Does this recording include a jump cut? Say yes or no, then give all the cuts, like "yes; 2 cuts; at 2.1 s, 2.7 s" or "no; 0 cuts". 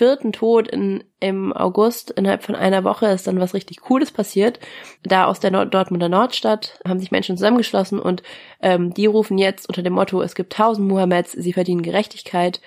yes; 2 cuts; at 5.0 s, 6.9 s